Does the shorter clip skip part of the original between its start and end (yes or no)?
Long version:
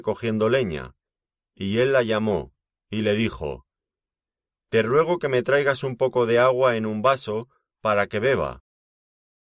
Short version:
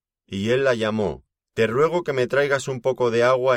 yes